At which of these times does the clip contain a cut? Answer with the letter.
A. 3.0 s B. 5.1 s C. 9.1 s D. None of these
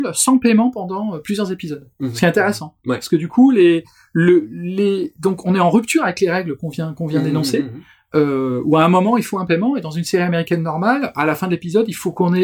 D